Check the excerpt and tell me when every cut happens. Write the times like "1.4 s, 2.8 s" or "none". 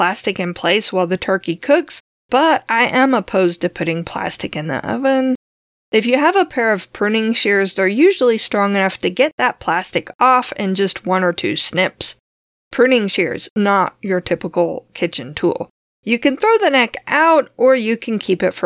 15.9 s

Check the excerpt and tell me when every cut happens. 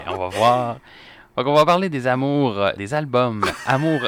2.8 s

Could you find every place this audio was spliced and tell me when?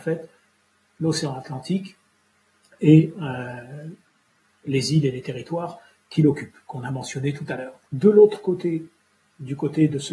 7.9 s

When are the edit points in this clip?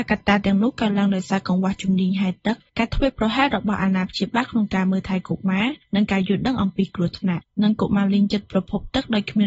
none

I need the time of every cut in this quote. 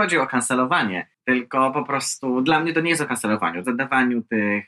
1.1 s, 3.6 s

